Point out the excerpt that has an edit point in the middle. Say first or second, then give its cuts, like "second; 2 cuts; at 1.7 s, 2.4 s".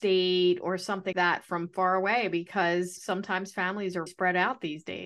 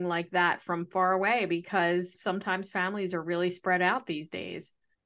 first; 2 cuts; at 1.1 s, 4.1 s